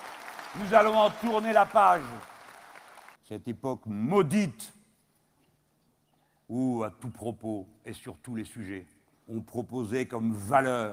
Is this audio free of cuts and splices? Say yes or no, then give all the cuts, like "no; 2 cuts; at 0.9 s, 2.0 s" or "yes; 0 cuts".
no; 1 cut; at 3.1 s